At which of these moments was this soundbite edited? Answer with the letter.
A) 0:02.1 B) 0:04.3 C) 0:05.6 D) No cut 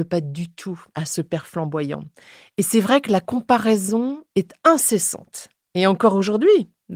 B